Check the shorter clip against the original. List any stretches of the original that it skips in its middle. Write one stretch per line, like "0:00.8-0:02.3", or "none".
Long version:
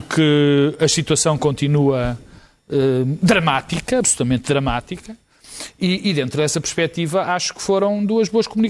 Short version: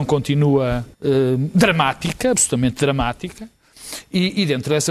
0:02.2-0:02.6